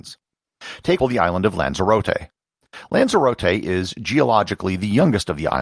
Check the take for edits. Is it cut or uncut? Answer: cut